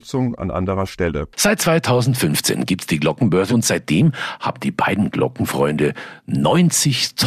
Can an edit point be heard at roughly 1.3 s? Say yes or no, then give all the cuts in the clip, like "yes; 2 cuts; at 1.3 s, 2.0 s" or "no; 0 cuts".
no; 1 cut; at 3.5 s